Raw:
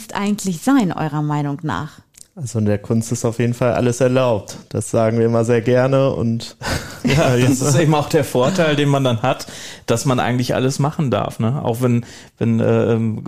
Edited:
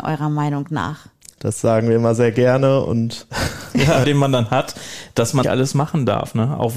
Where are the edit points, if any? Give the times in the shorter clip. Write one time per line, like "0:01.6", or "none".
0:01.4
0:04.0
0:05.4